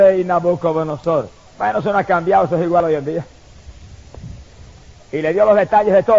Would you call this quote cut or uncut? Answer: cut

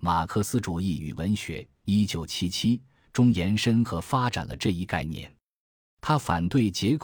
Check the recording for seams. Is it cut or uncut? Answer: uncut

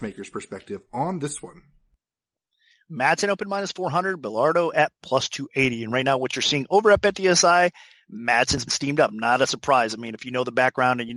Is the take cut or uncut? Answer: uncut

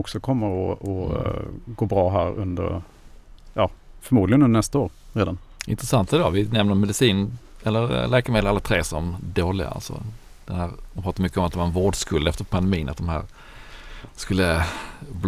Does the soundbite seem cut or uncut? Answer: uncut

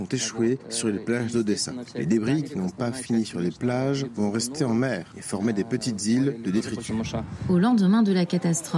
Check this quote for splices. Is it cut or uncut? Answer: uncut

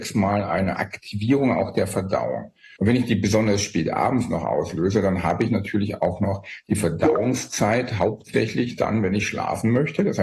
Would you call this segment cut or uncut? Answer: cut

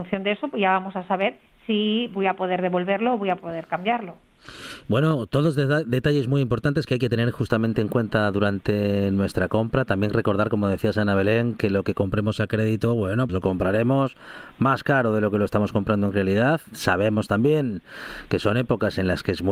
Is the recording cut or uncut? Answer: cut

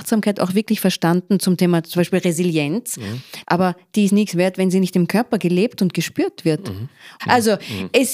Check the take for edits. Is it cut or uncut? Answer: cut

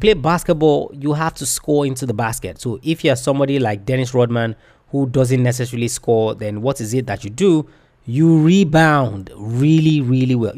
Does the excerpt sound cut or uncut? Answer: uncut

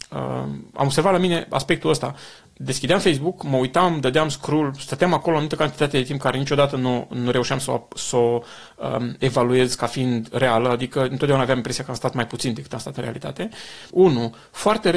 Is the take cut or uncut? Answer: cut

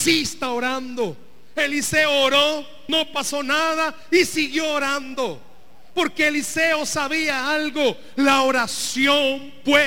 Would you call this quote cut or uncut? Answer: cut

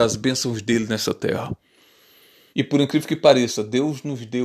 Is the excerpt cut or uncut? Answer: cut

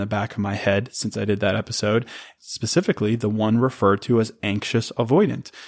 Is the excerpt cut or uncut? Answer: cut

